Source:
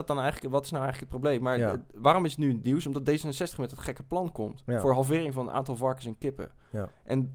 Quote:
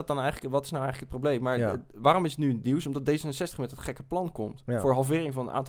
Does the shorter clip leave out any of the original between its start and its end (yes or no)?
no